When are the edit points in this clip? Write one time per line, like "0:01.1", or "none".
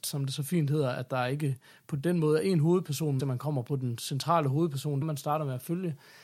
0:03.2
0:05.0